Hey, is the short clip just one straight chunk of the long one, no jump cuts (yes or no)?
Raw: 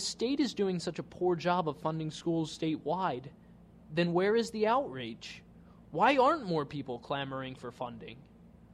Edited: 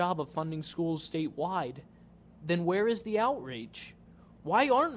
yes